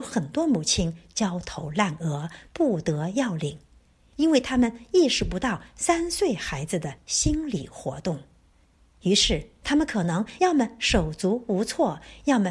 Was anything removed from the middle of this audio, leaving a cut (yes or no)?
no